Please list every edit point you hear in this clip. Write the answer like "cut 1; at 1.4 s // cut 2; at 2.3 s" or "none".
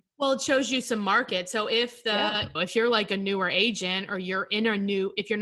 cut 1; at 2.6 s